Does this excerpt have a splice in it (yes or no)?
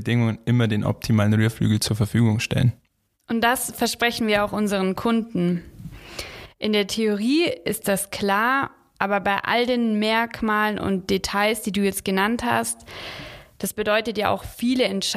no